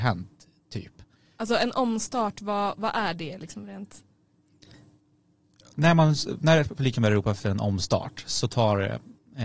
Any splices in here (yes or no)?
no